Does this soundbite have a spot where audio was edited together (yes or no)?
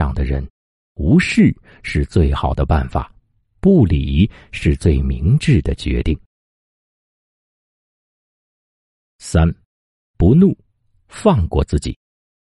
no